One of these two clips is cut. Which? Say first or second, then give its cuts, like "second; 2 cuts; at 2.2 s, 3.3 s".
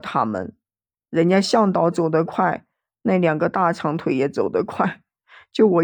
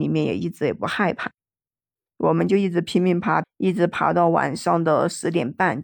second; 2 cuts; at 2.1 s, 3.4 s